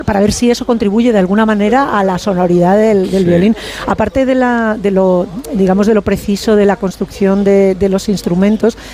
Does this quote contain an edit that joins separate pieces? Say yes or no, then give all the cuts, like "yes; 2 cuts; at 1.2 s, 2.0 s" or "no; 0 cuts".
no; 0 cuts